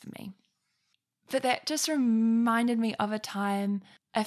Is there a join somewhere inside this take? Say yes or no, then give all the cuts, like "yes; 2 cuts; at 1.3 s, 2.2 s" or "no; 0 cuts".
no; 0 cuts